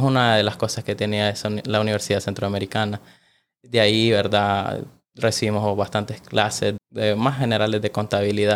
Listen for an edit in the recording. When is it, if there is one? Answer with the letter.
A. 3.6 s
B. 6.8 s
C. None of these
B